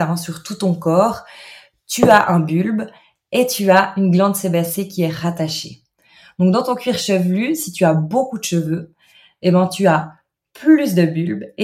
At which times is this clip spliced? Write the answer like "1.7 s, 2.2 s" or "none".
none